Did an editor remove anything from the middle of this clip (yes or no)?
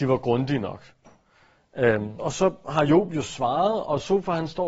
yes